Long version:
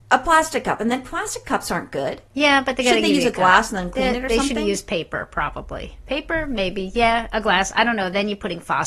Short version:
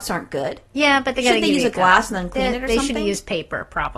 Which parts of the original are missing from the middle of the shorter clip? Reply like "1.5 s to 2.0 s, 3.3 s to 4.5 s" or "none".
none